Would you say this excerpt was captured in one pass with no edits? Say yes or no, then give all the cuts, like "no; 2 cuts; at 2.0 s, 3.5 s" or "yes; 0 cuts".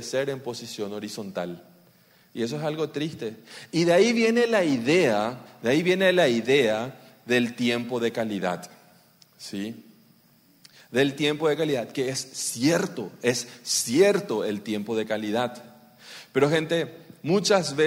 yes; 0 cuts